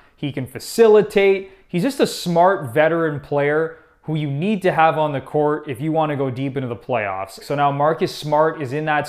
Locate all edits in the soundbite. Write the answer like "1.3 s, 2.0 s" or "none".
7.4 s